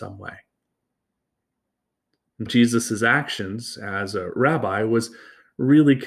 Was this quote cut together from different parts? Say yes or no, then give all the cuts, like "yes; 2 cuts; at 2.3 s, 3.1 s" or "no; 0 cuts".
yes; 1 cut; at 2.5 s